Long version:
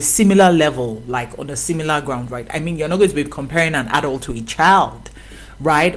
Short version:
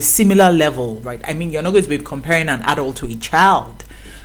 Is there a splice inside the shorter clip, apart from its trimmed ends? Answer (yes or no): yes